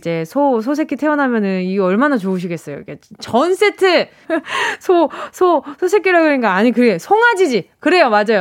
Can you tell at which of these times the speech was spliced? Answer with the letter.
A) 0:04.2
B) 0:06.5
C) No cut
A